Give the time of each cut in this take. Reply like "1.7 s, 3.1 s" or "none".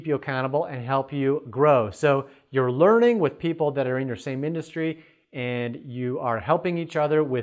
none